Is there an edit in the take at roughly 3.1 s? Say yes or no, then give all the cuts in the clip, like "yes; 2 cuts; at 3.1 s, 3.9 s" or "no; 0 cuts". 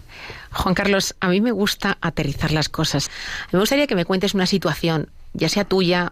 yes; 1 cut; at 3.1 s